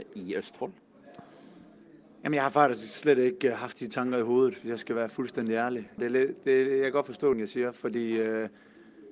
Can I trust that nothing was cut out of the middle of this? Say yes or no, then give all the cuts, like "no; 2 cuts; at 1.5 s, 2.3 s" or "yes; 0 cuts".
no; 2 cuts; at 6.0 s, 7.3 s